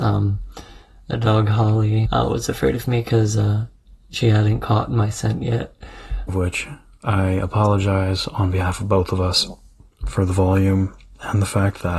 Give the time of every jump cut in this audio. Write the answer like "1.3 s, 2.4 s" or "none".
2.1 s, 6.3 s